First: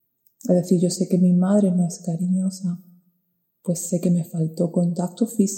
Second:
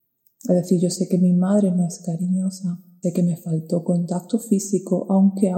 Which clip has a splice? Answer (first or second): second